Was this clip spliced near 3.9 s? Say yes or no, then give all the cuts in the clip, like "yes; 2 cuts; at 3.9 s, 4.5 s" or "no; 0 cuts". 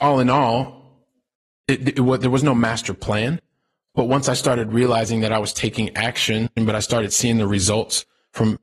no; 1 cut; at 6.6 s